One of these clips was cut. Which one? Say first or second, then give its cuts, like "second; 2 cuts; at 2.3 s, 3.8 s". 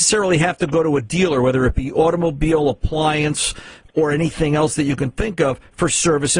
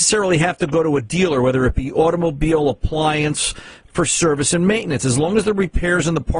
second; 1 cut; at 3.9 s